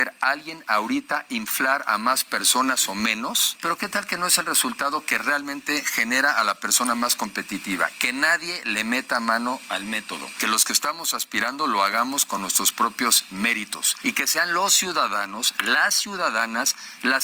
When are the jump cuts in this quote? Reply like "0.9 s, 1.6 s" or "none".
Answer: 3.6 s